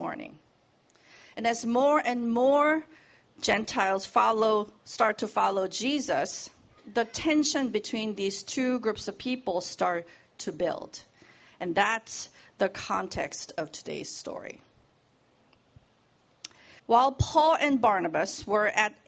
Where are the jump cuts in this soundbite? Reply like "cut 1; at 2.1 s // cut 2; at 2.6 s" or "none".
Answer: cut 1; at 16.8 s